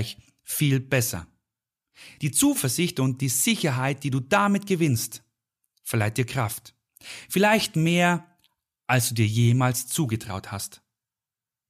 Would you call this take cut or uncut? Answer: uncut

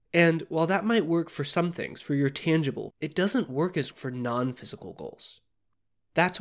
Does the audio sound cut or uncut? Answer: cut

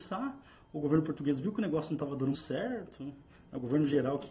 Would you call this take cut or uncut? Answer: cut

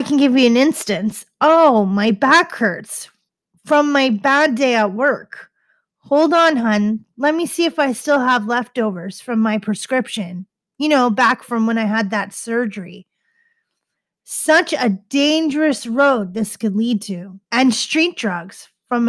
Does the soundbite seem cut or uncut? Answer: cut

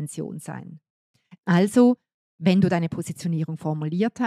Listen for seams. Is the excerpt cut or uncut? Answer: cut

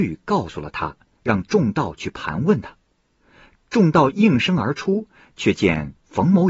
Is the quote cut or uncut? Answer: uncut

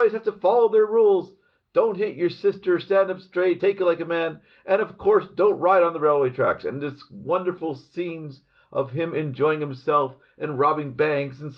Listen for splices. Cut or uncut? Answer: uncut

